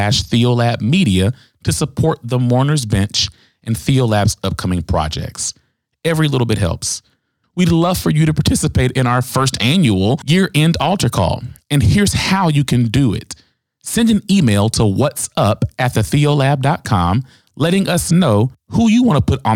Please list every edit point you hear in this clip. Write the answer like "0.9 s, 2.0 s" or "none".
7.4 s